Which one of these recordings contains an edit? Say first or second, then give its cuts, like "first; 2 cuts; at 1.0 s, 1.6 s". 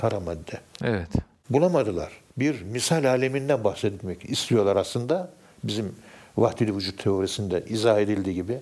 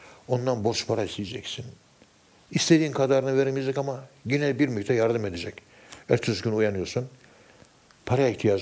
first; 1 cut; at 2.3 s